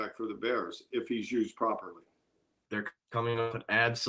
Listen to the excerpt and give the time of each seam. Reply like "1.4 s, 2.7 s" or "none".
2.6 s